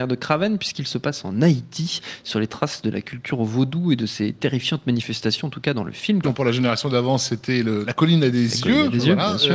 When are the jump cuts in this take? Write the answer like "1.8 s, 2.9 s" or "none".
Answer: 6.2 s, 7.8 s